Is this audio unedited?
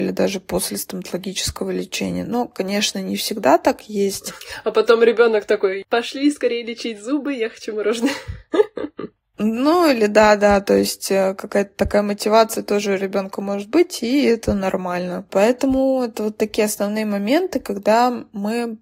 yes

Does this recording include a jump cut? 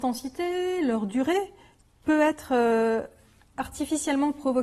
no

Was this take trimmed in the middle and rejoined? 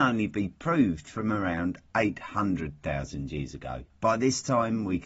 yes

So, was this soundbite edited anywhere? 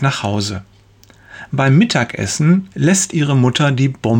yes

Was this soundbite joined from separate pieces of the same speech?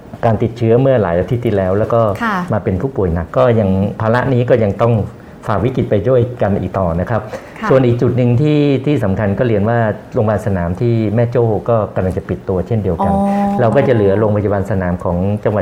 yes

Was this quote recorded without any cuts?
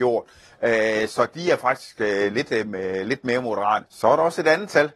no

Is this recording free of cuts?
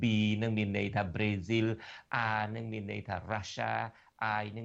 yes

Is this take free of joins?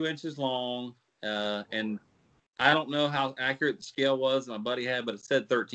yes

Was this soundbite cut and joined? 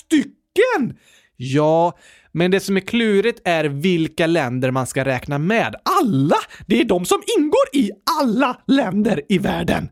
no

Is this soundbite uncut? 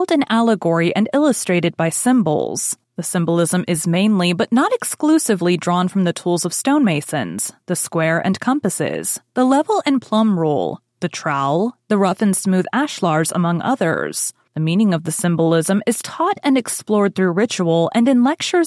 no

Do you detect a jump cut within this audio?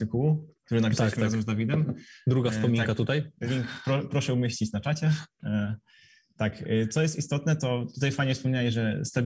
no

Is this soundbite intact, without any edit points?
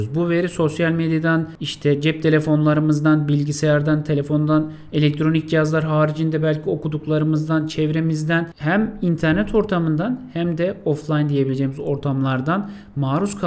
yes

